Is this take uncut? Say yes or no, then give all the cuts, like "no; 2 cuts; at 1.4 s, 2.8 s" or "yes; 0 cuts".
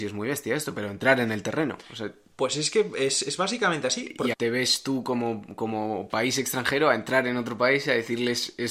no; 1 cut; at 4.3 s